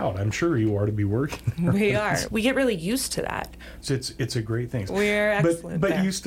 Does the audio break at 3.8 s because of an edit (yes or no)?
yes